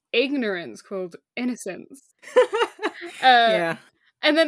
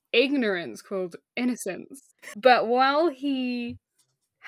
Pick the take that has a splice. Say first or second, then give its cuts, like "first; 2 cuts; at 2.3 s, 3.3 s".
second; 1 cut; at 2.3 s